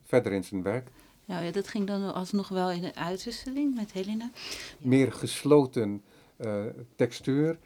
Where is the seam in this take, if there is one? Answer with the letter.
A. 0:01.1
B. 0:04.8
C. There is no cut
B